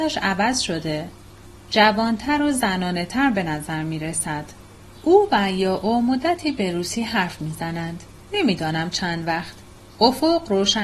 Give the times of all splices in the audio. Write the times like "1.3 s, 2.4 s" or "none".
none